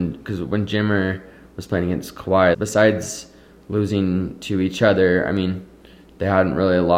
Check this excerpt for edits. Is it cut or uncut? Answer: cut